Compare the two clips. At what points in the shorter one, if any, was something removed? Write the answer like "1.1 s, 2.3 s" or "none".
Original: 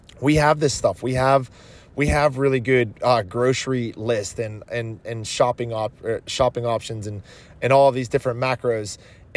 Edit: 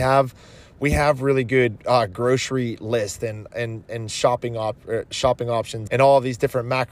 5.9 s